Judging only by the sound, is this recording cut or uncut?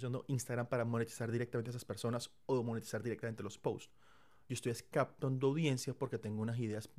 uncut